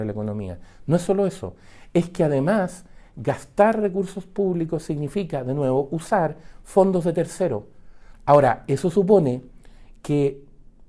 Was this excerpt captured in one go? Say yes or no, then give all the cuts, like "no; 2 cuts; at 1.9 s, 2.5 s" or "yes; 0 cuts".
no; 1 cut; at 8.1 s